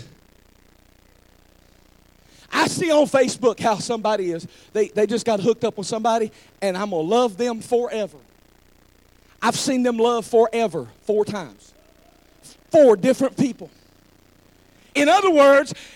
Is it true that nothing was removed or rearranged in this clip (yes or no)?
no